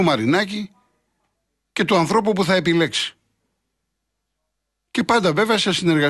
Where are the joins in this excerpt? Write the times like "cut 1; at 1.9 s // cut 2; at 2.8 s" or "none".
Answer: none